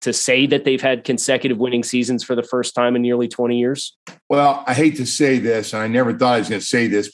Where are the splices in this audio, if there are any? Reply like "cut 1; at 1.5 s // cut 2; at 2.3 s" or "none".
none

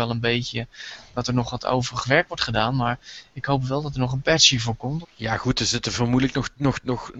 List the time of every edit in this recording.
cut 1; at 5.0 s

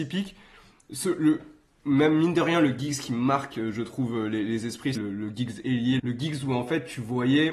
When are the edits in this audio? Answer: cut 1; at 4.9 s // cut 2; at 6.0 s

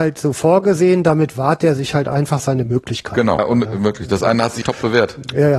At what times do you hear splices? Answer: cut 1; at 3.4 s // cut 2; at 4.6 s

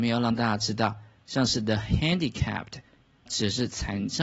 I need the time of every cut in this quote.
cut 1; at 3.3 s

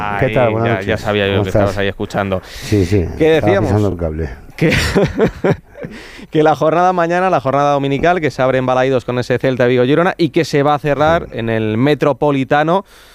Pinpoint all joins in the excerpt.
none

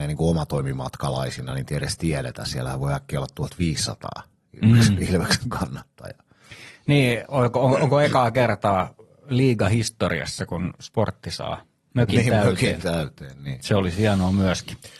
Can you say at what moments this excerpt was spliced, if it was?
none

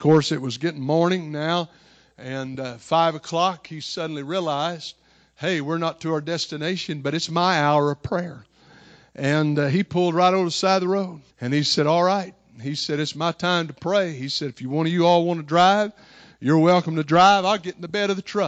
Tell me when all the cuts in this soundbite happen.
cut 1; at 11.3 s

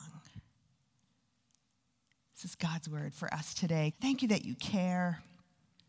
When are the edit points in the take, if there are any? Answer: cut 1; at 3.9 s

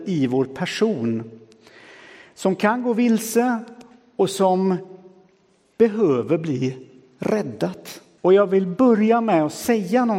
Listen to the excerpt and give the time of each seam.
cut 1; at 8.2 s

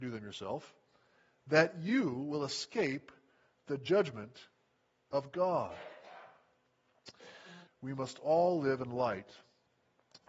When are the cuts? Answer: cut 1; at 7.7 s

